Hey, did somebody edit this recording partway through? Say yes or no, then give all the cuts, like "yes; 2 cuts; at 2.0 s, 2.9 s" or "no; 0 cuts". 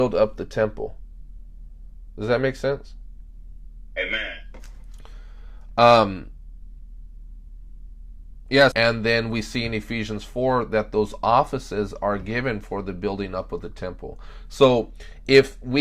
yes; 1 cut; at 8.7 s